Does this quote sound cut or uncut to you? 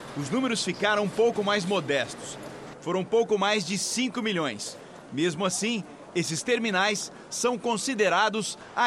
uncut